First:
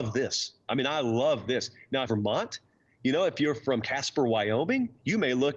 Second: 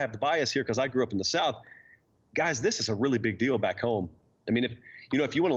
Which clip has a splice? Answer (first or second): first